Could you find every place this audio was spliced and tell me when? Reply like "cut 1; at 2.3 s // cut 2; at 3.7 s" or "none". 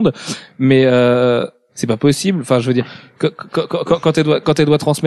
cut 1; at 1.7 s